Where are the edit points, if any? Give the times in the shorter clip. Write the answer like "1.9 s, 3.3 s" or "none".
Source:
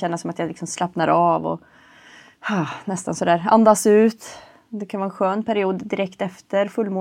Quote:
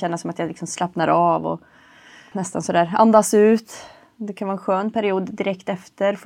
2.3 s